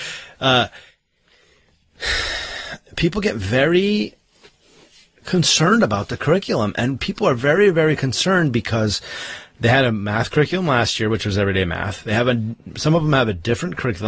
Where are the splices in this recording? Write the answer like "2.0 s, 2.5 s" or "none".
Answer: none